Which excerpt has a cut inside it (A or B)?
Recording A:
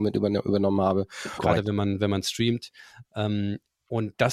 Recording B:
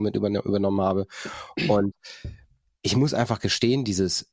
A